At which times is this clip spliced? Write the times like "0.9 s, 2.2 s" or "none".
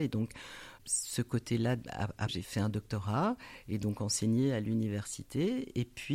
2.3 s

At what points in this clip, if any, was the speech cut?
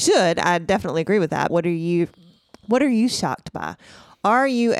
1.5 s

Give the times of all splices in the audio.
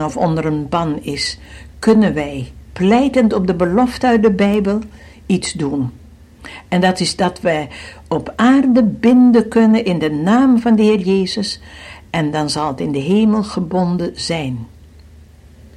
none

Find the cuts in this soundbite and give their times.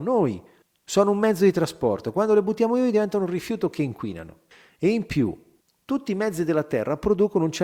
none

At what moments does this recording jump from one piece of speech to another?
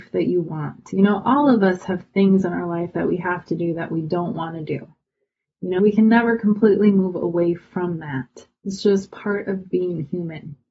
5.8 s

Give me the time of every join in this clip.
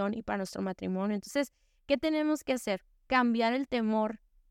none

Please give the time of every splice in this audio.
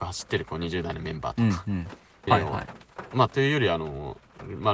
2.3 s

